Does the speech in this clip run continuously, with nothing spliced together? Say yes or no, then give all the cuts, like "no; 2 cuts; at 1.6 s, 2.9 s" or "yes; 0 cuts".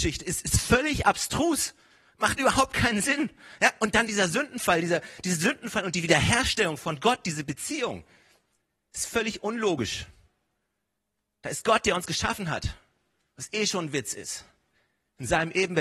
yes; 0 cuts